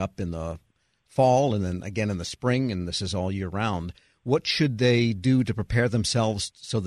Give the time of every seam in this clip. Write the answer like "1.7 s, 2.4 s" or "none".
none